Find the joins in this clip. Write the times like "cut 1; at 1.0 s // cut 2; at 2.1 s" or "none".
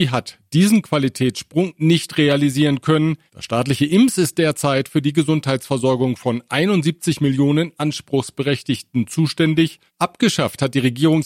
cut 1; at 3.3 s // cut 2; at 9.9 s

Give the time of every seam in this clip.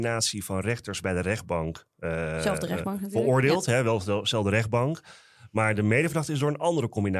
none

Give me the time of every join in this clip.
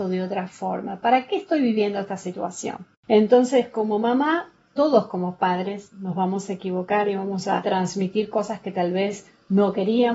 none

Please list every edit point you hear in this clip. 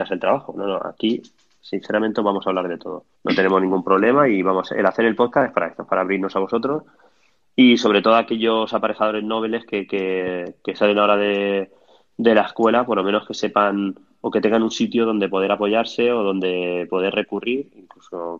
cut 1; at 3.1 s

